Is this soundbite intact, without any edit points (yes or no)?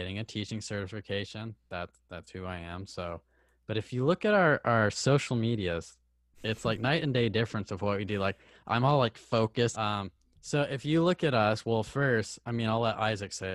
no